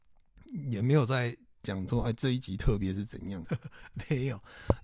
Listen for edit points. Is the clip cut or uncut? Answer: cut